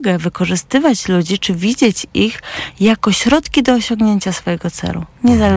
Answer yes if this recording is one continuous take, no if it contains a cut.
yes